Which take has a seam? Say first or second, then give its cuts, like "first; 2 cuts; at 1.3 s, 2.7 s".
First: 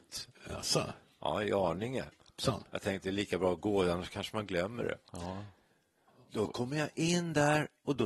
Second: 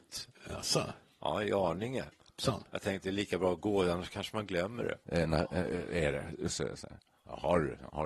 second; 2 cuts; at 5.0 s, 6.5 s